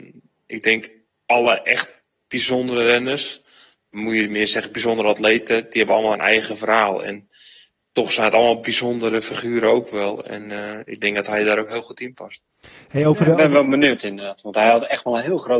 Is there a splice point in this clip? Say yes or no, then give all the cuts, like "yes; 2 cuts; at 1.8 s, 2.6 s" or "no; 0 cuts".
no; 0 cuts